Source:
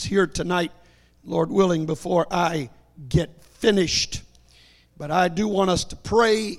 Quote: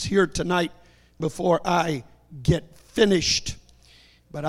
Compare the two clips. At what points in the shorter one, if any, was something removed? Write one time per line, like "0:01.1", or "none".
0:01.2